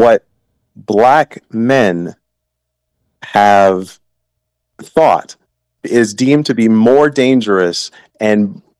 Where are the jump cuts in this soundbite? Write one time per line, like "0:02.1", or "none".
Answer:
none